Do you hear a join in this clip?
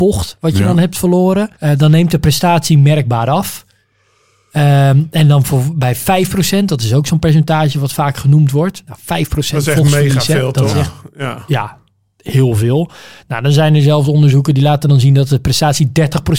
yes; 1 cut; at 1.5 s

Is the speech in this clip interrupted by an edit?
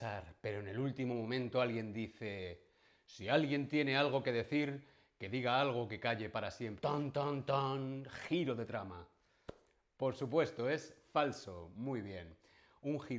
yes; 1 cut; at 6.8 s

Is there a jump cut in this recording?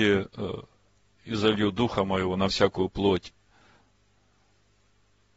no; 0 cuts

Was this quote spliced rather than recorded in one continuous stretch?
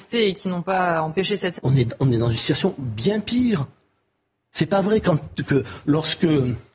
yes; 1 cut; at 1.6 s

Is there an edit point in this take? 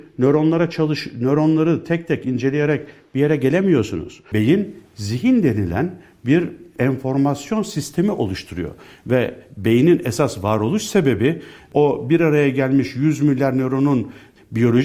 no; 0 cuts

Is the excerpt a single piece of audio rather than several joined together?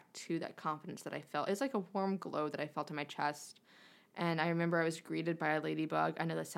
yes; 0 cuts

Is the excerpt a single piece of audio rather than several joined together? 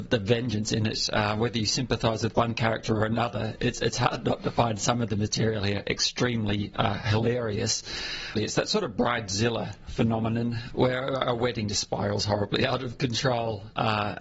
no; 2 cuts; at 8.4 s, 10.7 s

